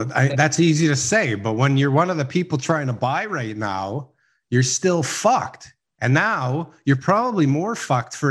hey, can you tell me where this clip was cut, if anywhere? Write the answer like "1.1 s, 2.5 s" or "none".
none